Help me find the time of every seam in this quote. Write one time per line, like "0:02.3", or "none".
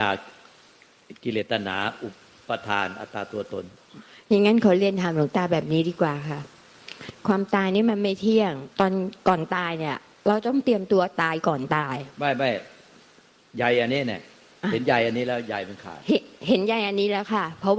0:08.7